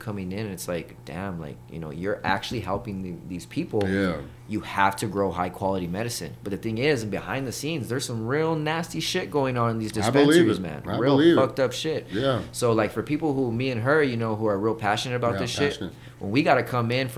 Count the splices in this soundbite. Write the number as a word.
zero